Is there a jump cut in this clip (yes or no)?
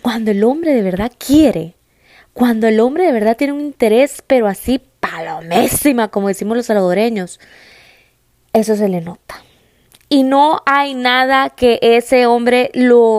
no